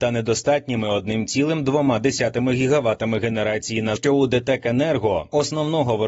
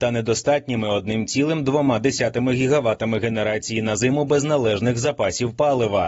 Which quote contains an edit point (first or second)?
first